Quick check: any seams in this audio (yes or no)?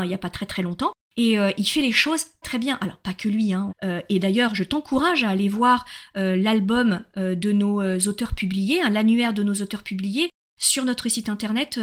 yes